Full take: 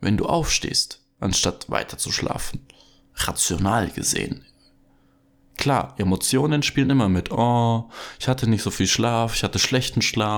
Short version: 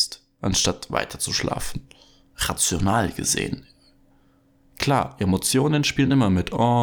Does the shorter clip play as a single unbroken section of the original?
yes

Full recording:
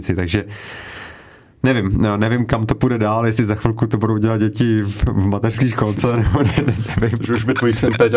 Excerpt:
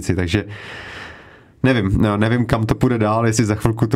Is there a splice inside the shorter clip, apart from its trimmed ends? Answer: no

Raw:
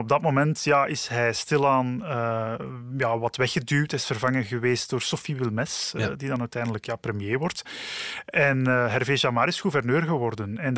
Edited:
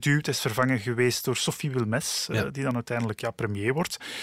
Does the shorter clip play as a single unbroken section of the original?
yes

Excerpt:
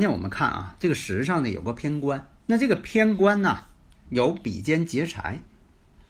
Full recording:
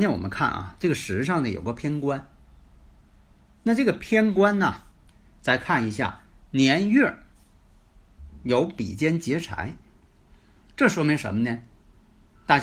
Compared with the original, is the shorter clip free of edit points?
no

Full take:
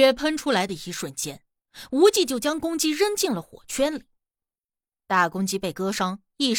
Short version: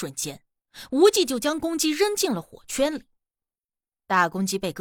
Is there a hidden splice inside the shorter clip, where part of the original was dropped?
no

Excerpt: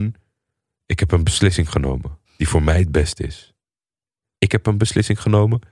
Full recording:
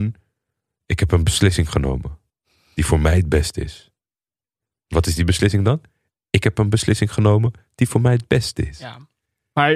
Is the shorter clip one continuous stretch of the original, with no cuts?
no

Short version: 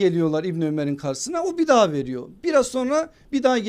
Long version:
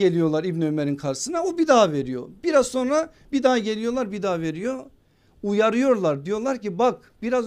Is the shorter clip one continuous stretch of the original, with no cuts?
yes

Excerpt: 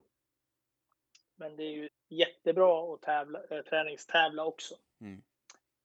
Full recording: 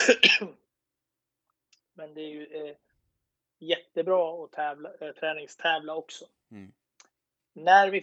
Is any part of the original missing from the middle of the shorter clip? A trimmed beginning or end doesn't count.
yes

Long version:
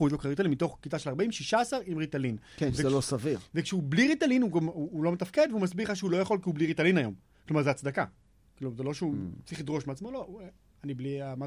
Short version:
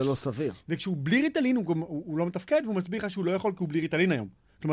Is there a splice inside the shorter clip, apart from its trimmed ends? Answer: no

